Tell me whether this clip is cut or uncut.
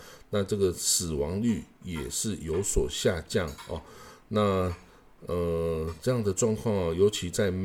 uncut